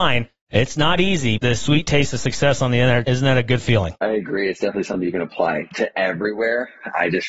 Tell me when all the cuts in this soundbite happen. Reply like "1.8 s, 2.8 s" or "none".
1.4 s